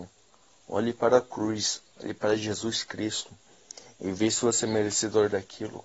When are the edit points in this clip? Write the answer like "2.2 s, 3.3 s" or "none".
none